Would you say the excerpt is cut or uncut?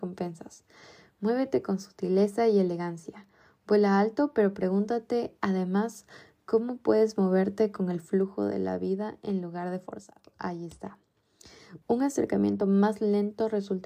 cut